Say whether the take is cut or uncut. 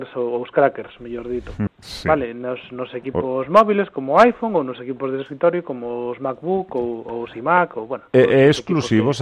cut